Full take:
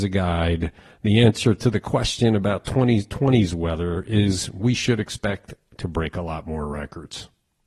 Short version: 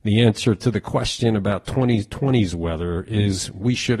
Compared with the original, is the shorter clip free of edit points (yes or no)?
yes